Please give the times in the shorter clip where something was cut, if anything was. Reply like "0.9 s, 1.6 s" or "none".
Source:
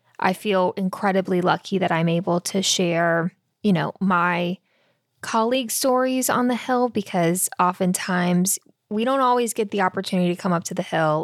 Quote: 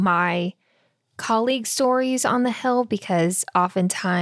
none